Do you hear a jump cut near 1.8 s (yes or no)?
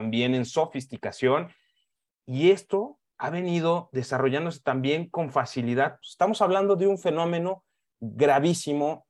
no